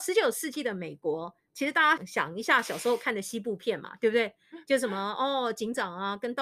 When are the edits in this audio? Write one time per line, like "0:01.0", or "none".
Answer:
0:02.0